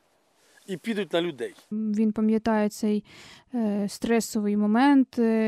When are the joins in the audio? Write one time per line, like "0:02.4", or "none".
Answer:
0:01.7